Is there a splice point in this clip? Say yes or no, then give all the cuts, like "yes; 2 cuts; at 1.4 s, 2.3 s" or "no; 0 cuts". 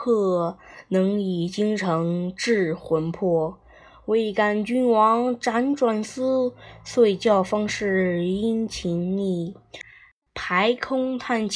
no; 0 cuts